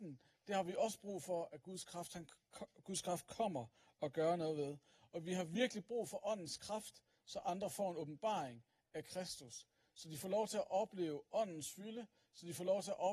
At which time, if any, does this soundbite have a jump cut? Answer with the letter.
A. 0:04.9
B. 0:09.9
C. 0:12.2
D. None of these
D